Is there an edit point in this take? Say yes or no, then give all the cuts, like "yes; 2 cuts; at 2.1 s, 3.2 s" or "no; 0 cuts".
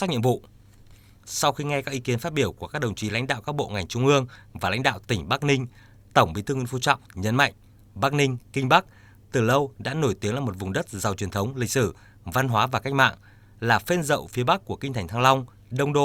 no; 0 cuts